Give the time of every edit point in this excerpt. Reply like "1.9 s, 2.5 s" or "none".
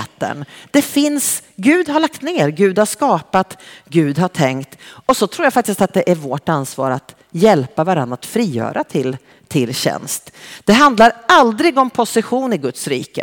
none